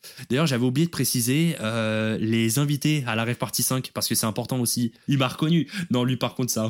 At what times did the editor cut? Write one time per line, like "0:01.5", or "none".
0:05.1